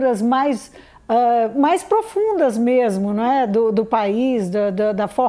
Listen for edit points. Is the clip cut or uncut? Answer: uncut